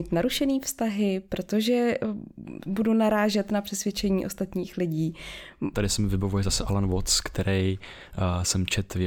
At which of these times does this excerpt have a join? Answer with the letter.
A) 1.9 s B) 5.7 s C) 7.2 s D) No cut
B